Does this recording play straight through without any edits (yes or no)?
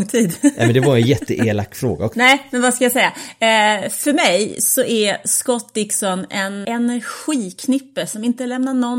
no